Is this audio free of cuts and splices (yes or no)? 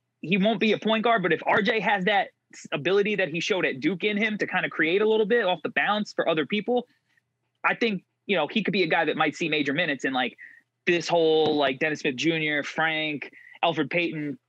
yes